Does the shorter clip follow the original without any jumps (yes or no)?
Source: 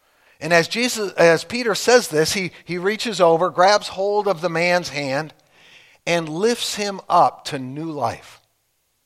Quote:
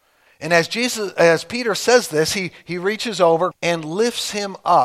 no